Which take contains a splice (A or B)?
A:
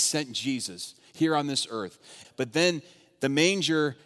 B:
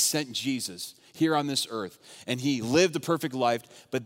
A